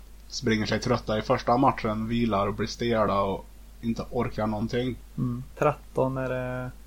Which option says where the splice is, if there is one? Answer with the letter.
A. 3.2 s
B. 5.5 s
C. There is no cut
B